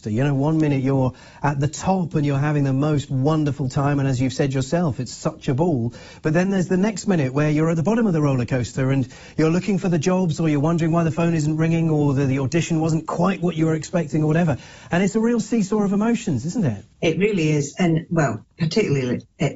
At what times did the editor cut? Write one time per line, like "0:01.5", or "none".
0:16.9

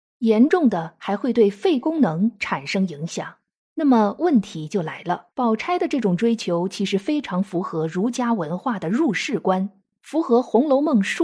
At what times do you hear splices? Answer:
0:03.6
0:05.3

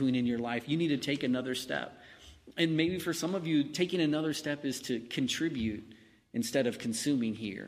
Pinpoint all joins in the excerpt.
none

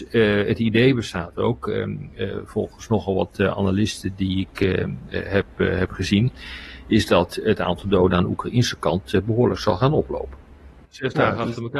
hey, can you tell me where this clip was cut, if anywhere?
0:10.8

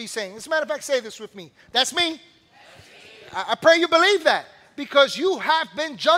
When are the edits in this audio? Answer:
none

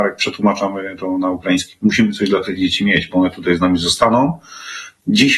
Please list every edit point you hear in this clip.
none

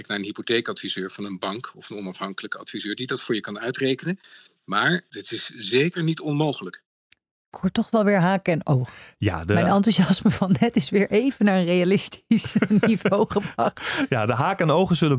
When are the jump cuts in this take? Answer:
none

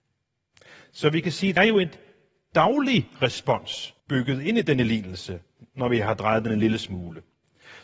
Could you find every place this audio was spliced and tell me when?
0:01.6
0:04.0

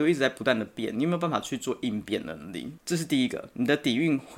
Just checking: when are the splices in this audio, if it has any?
0:02.8

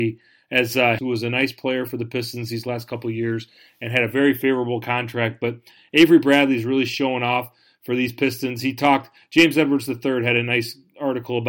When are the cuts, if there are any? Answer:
0:01.0

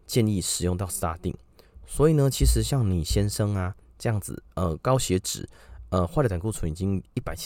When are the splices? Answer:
none

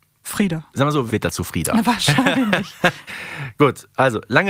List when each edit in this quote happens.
0:01.1
0:03.1

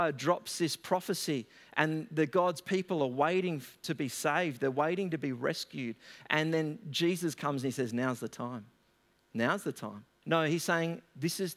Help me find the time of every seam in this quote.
0:10.2

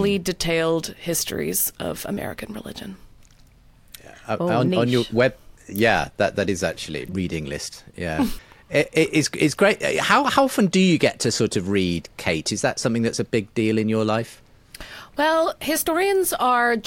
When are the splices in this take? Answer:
0:07.1
0:08.4

